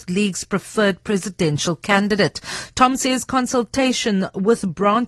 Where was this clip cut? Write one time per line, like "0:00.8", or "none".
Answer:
none

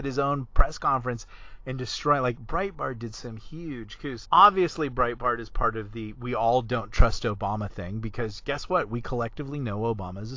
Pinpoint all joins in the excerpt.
0:04.2

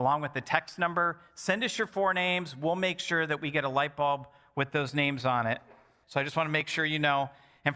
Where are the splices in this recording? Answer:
0:06.0

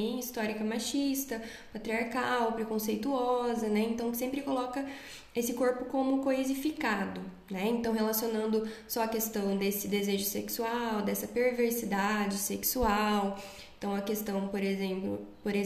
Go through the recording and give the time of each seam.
none

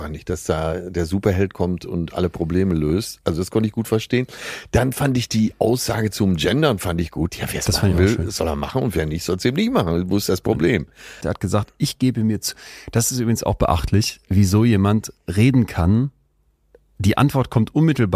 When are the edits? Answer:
0:07.3
0:11.2

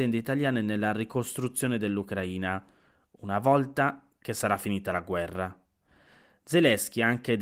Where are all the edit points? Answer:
none

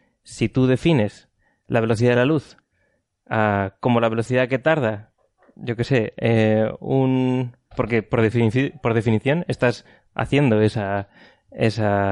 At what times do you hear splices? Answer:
0:07.7

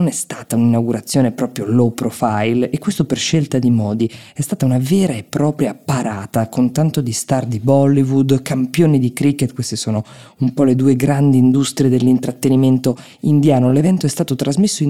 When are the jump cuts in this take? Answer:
none

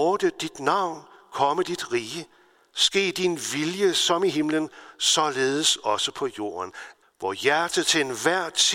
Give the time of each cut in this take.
0:07.0

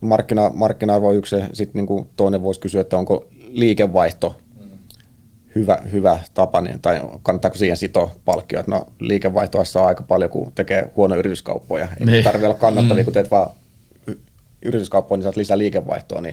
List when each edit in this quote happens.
none

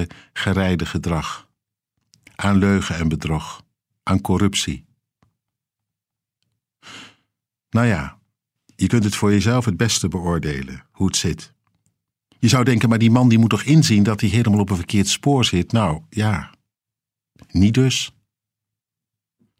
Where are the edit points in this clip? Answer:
none

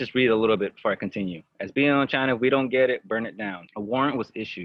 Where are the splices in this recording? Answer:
0:03.7

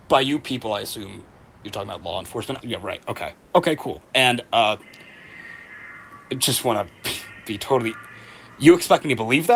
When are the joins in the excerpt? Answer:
0:02.6

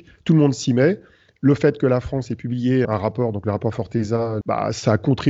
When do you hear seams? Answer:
0:02.8
0:04.4

